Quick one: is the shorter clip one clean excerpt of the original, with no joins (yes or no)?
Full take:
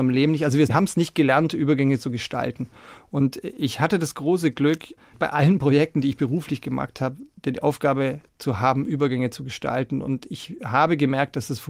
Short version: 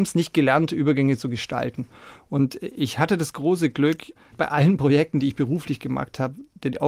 yes